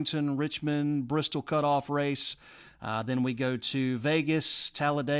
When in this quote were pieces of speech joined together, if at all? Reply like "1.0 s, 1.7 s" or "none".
none

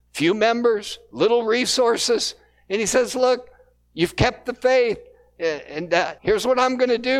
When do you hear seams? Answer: 6.2 s

